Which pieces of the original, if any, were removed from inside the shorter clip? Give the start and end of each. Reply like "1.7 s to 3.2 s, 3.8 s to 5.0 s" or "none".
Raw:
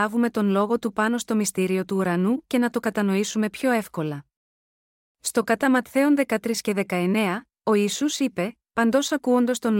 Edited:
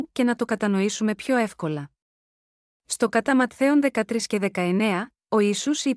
none